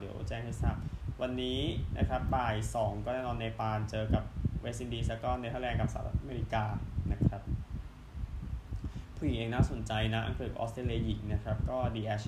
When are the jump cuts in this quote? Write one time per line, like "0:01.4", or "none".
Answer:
none